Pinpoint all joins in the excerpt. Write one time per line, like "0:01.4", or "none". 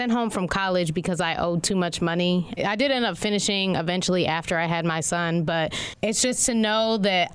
0:02.6

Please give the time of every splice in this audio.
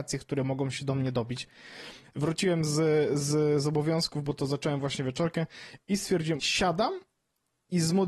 0:02.0
0:06.4

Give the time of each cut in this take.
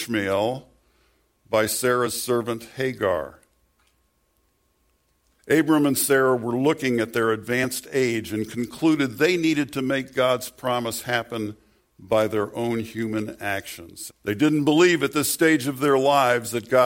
0:05.4
0:14.1

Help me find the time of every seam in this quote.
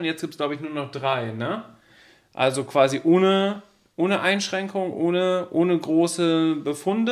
none

